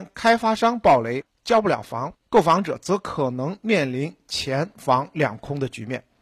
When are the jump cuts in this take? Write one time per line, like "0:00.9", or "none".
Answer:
0:01.4

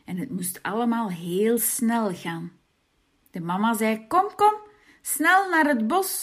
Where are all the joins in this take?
none

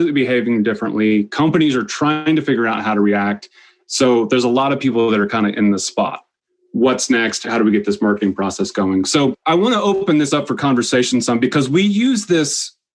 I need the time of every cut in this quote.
none

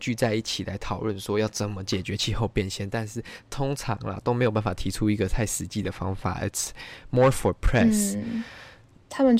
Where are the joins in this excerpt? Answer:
none

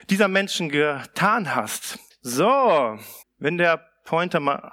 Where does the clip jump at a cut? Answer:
0:02.1
0:03.2

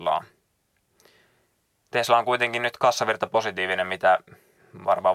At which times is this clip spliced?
none

